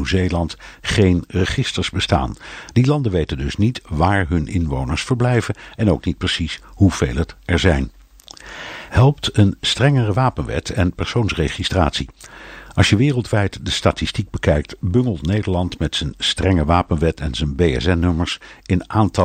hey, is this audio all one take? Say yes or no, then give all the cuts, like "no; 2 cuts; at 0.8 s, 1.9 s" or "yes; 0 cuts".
yes; 0 cuts